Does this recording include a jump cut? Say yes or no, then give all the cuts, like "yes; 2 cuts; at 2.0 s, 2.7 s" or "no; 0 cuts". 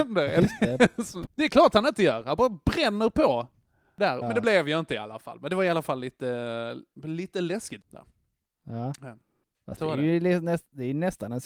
yes; 3 cuts; at 1.2 s, 4.2 s, 7.8 s